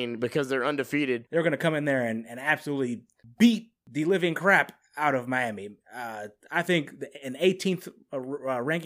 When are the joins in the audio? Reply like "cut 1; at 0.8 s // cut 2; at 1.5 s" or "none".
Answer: cut 1; at 1.3 s